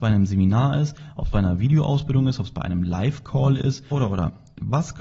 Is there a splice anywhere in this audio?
yes; 1 cut; at 3.9 s

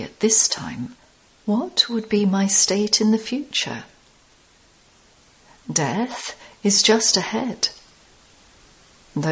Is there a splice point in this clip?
no; 0 cuts

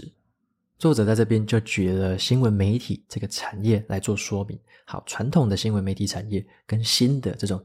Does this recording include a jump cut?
no; 0 cuts

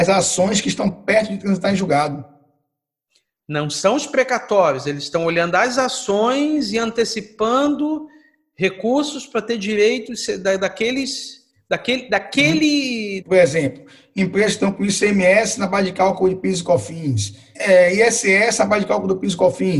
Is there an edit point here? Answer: yes; 2 cuts; at 13.2 s, 17.5 s

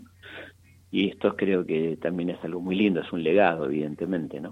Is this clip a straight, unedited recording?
yes; 0 cuts

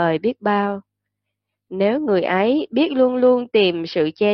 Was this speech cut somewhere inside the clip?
no; 0 cuts

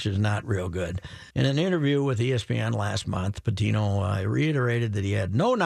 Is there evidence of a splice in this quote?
yes; 1 cut; at 1.3 s

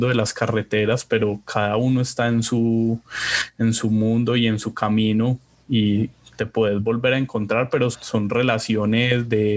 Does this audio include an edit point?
yes; 1 cut; at 7.9 s

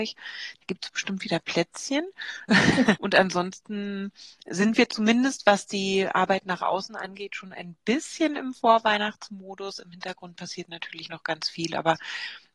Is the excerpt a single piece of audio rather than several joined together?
no; 1 cut; at 2.9 s

